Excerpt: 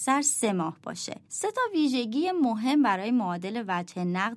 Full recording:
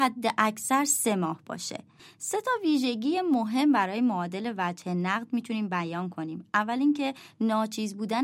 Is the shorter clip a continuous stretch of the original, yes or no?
no